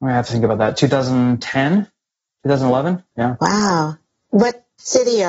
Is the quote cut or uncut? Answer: cut